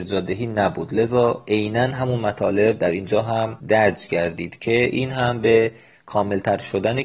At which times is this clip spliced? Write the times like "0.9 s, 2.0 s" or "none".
3.6 s